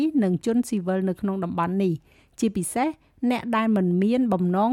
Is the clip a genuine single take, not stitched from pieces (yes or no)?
yes